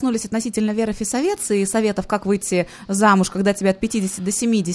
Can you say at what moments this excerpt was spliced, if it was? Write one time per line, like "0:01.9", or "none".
none